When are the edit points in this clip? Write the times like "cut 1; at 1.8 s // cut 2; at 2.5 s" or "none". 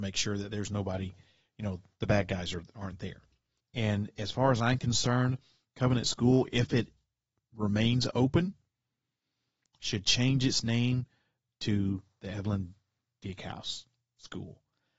cut 1; at 3.6 s